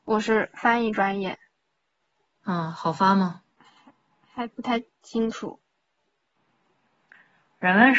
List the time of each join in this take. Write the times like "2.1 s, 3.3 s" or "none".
none